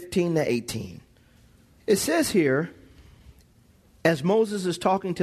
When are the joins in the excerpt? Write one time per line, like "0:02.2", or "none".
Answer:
0:01.8